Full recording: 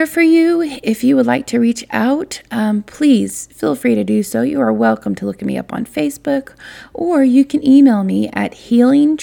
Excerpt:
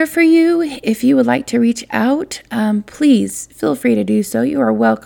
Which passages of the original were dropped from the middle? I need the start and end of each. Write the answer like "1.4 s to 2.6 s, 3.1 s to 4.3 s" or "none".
none